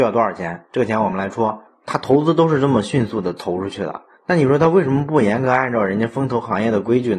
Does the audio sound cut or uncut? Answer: cut